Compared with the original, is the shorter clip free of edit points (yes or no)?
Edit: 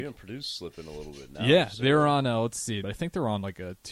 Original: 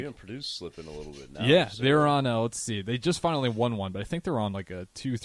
no